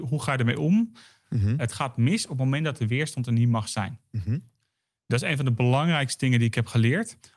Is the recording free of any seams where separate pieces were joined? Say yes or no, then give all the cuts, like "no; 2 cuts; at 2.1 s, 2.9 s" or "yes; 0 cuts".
no; 1 cut; at 1.2 s